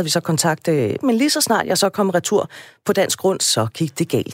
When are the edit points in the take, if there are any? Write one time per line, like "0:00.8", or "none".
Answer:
0:01.0